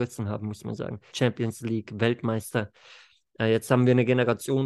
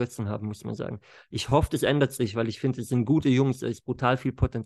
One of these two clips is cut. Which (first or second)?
first